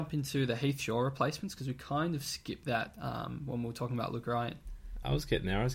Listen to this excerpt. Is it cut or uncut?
uncut